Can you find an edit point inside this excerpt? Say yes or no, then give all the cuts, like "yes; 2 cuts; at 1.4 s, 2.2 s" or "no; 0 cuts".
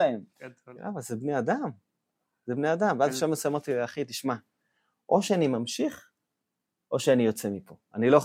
no; 0 cuts